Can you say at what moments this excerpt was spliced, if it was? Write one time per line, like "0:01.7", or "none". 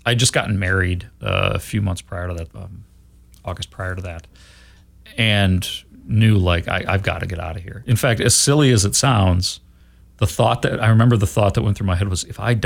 0:02.5